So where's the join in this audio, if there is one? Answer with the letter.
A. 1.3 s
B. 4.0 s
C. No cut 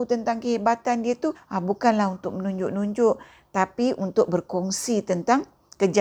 A